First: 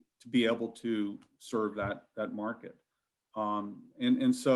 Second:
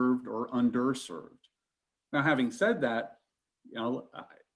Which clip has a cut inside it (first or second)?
second